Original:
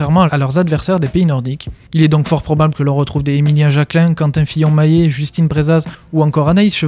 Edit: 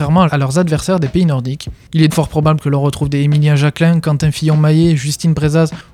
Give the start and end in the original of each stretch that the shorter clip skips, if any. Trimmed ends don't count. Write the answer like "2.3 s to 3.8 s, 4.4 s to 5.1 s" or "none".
2.1 s to 2.2 s